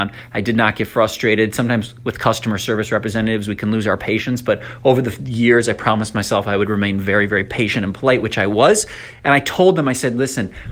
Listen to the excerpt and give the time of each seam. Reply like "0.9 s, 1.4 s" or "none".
none

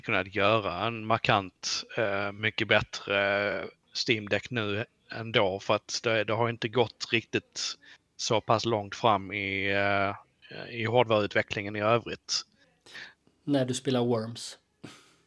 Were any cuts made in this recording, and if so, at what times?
12.9 s

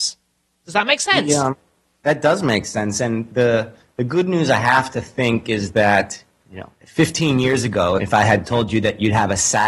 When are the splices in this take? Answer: 6.8 s, 8.0 s

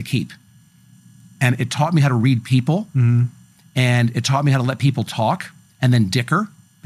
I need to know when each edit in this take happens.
none

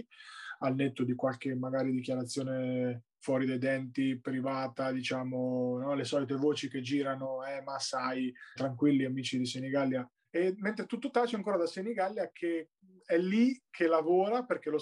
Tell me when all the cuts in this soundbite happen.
8.6 s, 10.2 s

